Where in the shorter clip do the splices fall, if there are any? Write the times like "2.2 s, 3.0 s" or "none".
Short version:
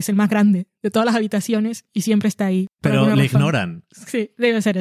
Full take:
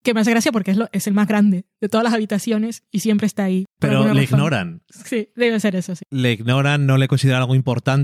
none